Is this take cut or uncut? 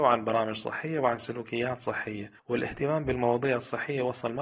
cut